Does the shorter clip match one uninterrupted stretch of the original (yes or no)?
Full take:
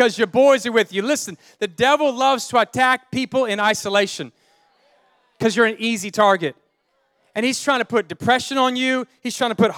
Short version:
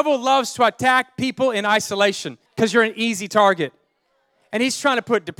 no